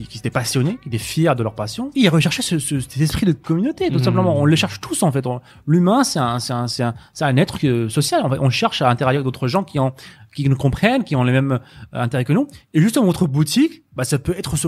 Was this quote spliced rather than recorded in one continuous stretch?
no; 0 cuts

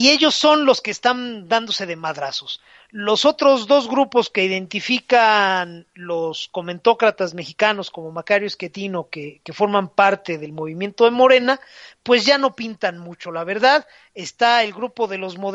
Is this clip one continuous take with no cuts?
yes; 0 cuts

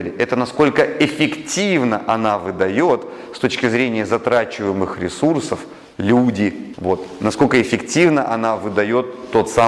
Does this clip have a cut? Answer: yes; 1 cut; at 6.7 s

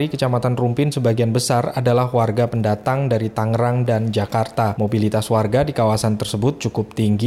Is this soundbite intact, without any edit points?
yes; 0 cuts

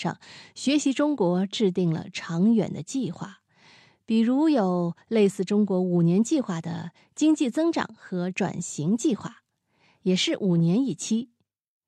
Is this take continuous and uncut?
yes; 0 cuts

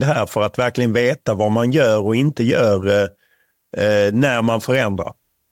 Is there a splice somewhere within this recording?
no; 0 cuts

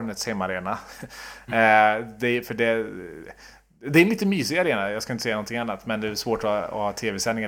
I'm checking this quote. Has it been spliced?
no; 0 cuts

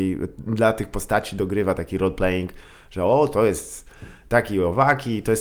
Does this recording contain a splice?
no; 0 cuts

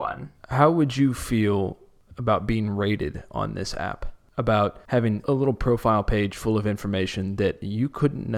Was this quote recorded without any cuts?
yes; 0 cuts

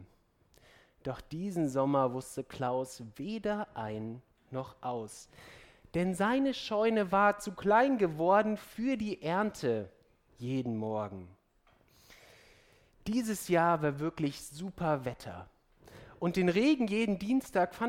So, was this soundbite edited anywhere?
no; 0 cuts

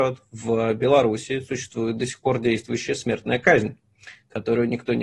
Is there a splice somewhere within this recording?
no; 0 cuts

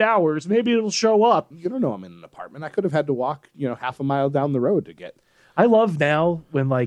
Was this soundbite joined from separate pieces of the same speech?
yes; 1 cut; at 1.5 s

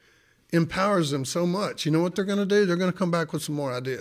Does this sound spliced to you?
no; 0 cuts

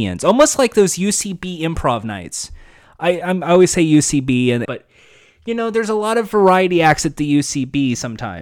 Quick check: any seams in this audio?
yes; 2 cuts; at 3.2 s, 4.7 s

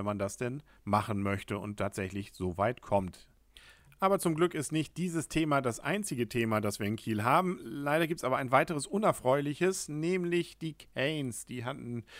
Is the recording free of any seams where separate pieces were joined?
yes; 0 cuts

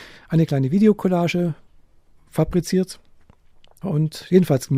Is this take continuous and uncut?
no; 1 cut; at 3.8 s

